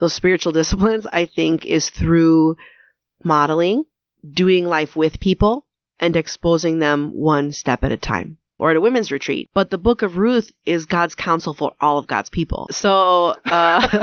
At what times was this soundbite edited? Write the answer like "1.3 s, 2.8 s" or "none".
8.6 s, 12.7 s